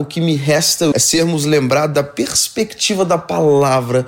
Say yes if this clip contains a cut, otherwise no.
yes